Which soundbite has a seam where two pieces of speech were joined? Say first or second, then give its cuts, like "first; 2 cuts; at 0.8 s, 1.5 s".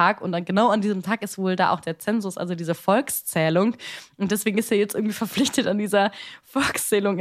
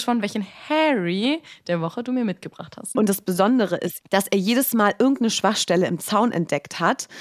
second; 2 cuts; at 2.9 s, 4.0 s